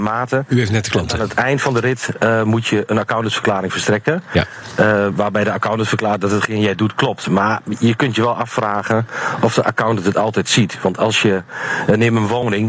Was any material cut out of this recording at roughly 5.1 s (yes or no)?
no